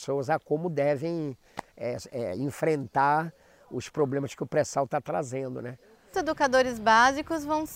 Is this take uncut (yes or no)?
yes